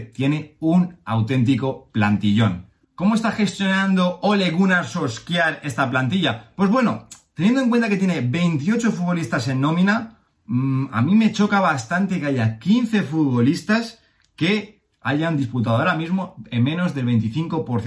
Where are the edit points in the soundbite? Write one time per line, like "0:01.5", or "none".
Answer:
none